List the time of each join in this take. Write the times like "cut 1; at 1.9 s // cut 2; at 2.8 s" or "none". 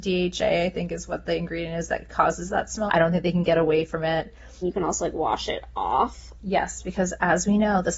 cut 1; at 2.9 s // cut 2; at 4.6 s